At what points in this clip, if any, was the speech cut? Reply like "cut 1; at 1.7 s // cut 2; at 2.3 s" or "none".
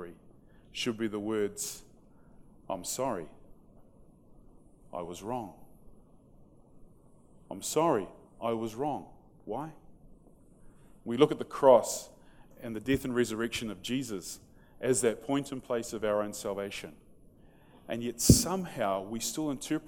cut 1; at 2.6 s // cut 2; at 7.5 s // cut 3; at 11.0 s